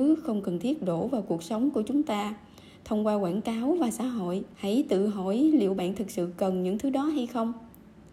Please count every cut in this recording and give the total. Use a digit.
1